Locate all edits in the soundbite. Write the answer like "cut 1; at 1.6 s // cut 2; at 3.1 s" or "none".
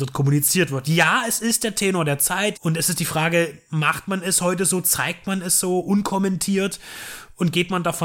cut 1; at 2.5 s